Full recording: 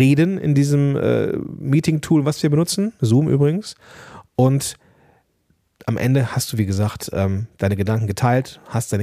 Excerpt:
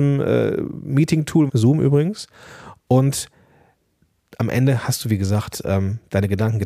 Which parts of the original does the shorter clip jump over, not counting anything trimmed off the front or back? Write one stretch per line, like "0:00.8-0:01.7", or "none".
0:02.2-0:03.0